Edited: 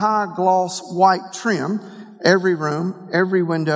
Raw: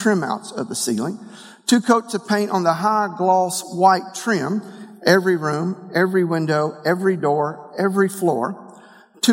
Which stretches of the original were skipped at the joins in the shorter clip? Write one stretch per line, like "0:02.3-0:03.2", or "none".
none

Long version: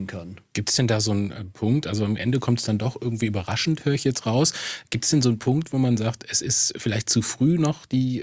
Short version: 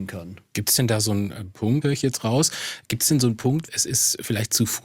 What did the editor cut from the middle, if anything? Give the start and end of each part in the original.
0:01.8-0:03.8
0:05.7-0:06.2

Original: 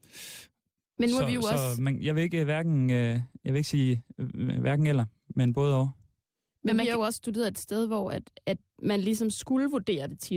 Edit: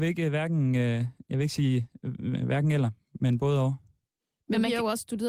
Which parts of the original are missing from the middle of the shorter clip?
none

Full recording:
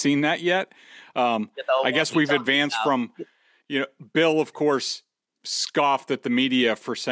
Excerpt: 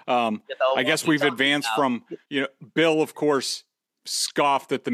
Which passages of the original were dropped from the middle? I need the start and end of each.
0:03.3-0:03.6

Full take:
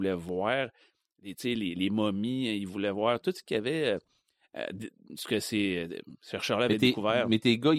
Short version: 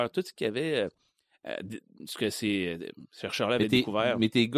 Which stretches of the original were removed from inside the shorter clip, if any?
none

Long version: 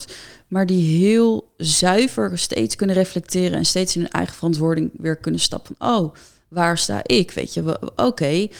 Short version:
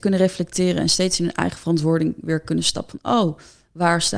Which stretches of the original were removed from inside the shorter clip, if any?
none

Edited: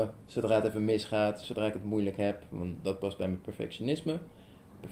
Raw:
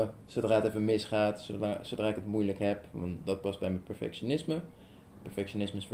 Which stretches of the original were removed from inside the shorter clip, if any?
0:01.4-0:01.8

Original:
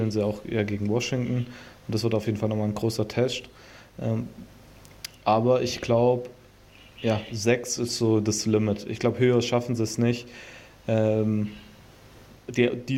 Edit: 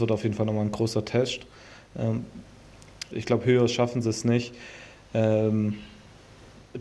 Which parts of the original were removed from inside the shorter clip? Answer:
0:05.1-0:08.8

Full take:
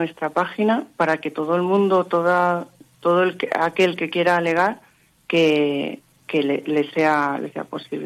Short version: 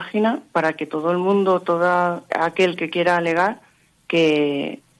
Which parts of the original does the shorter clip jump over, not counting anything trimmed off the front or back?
0:02.7-0:03.5

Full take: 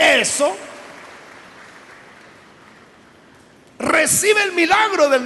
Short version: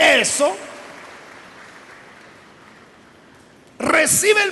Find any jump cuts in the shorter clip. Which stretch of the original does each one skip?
none

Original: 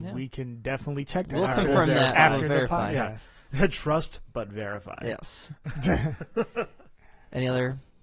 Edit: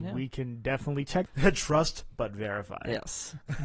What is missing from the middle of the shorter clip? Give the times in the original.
0:01.3-0:03.4

